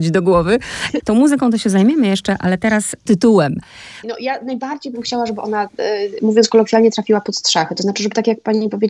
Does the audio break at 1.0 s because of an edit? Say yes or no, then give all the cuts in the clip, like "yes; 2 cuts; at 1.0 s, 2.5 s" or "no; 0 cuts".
yes; 2 cuts; at 1.0 s, 4.0 s